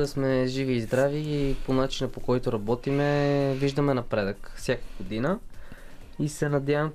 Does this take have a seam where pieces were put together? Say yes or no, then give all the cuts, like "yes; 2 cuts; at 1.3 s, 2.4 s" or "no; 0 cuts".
no; 0 cuts